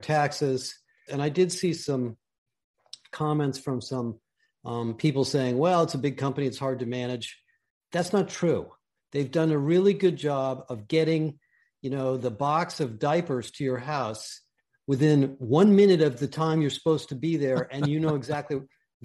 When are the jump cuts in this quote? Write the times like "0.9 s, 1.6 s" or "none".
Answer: 1.1 s